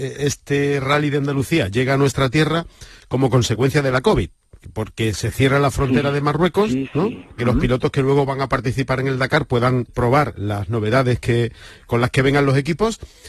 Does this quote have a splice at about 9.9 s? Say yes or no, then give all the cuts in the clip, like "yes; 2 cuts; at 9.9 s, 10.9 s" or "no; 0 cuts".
yes; 2 cuts; at 7.4 s, 9.9 s